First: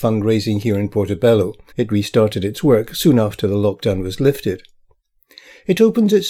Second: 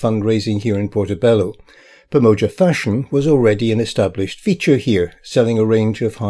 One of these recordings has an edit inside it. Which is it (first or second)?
first